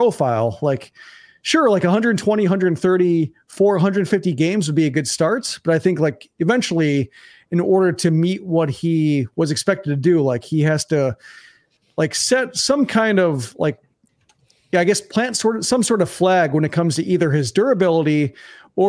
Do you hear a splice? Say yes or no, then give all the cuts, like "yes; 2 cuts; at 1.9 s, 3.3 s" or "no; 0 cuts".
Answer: no; 0 cuts